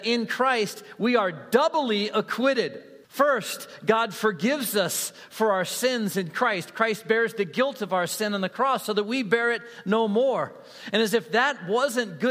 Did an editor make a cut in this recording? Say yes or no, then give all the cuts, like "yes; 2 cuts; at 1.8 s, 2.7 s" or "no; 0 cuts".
yes; 1 cut; at 3.0 s